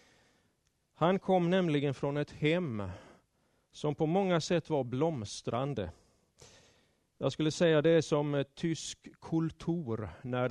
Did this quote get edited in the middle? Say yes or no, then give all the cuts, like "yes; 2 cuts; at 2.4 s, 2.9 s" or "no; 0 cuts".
no; 0 cuts